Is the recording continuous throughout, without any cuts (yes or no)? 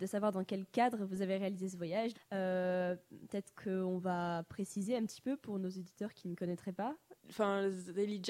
no